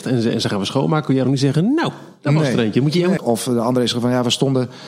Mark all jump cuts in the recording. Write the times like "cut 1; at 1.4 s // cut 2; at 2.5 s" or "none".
cut 1; at 3.2 s